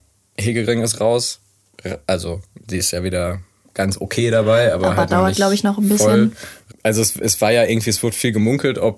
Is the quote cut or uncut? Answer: cut